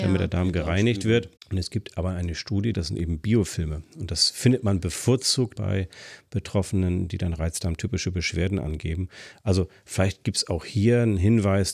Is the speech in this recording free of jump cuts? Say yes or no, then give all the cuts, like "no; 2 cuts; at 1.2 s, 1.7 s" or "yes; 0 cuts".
no; 3 cuts; at 1.4 s, 2.7 s, 5.6 s